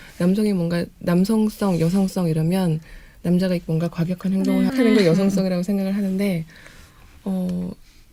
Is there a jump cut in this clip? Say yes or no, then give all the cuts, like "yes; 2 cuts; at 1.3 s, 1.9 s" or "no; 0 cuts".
yes; 1 cut; at 4.7 s